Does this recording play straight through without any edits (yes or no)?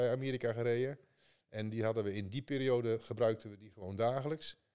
yes